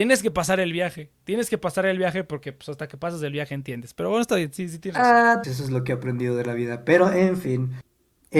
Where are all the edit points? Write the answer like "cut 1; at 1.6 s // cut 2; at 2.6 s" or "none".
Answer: cut 1; at 5.4 s